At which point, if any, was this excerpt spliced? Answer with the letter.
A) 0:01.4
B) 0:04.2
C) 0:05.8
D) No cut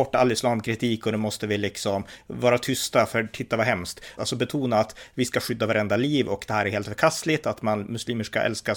B